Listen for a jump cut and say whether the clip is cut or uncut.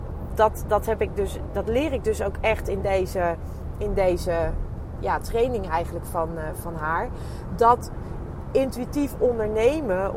uncut